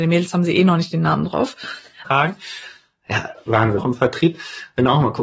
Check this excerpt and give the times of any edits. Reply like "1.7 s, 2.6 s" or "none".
2.1 s, 3.8 s